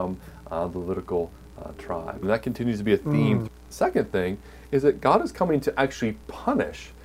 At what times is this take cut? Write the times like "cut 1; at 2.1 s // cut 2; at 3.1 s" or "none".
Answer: cut 1; at 2.2 s // cut 2; at 3.5 s